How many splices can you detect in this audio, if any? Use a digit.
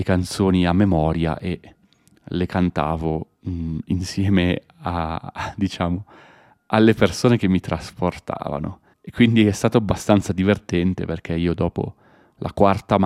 1